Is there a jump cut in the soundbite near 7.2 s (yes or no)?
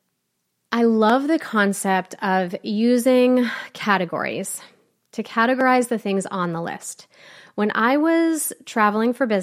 no